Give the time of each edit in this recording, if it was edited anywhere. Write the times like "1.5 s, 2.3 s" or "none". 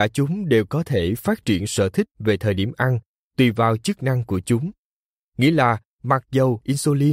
5.3 s